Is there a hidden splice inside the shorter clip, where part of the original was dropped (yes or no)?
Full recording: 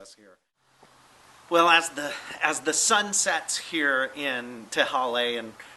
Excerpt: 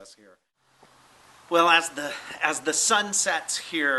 no